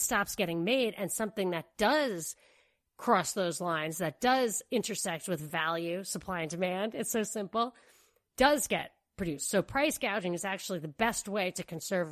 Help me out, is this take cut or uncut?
uncut